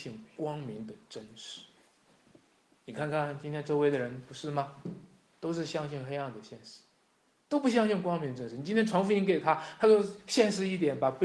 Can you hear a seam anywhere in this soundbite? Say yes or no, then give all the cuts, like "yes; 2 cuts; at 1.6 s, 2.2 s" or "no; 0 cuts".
no; 0 cuts